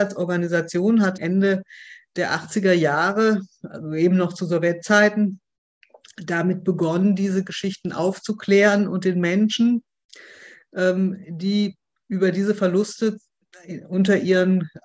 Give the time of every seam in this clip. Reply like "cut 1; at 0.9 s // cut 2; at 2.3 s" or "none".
cut 1; at 1.2 s

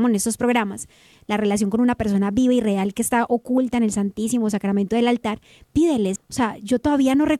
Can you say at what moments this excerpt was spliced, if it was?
cut 1; at 6.2 s

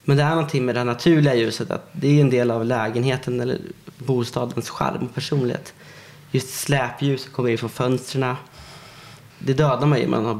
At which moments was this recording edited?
cut 1; at 9.3 s

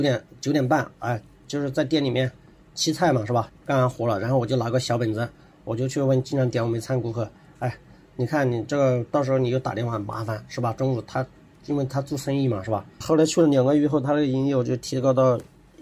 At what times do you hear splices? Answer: cut 1; at 3.5 s // cut 2; at 13.0 s

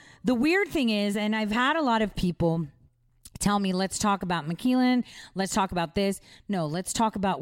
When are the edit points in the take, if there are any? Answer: none

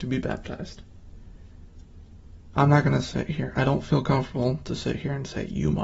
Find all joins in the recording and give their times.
cut 1; at 2.5 s

